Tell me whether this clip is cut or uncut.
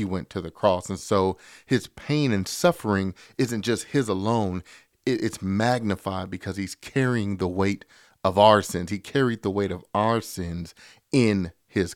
uncut